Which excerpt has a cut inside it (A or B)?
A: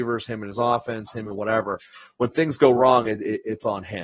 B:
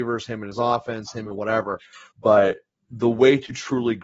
B